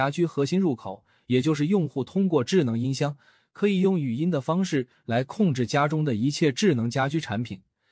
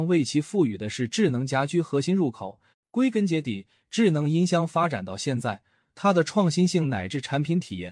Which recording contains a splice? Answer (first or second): second